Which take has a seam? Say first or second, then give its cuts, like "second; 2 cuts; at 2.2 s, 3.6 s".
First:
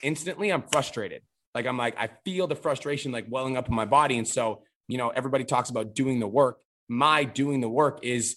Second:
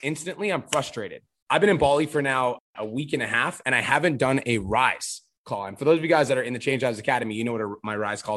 second; 1 cut; at 1.4 s